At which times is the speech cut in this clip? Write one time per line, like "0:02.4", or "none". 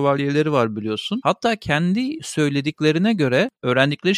0:01.2